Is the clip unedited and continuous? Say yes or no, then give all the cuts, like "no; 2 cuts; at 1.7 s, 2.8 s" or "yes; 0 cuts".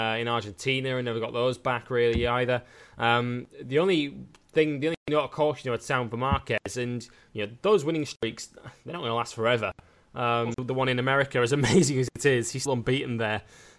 no; 2 cuts; at 10.5 s, 12.7 s